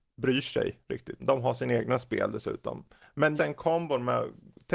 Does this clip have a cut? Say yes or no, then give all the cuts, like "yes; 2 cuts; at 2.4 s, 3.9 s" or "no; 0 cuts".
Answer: yes; 2 cuts; at 1.2 s, 3.4 s